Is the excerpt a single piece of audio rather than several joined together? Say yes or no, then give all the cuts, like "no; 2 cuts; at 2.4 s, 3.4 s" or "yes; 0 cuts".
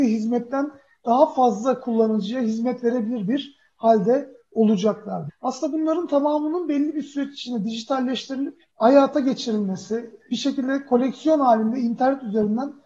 no; 2 cuts; at 5.3 s, 8.7 s